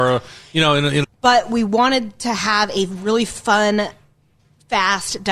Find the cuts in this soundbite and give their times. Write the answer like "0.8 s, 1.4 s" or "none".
1.0 s